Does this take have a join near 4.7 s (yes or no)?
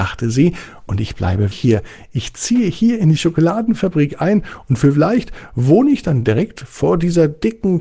no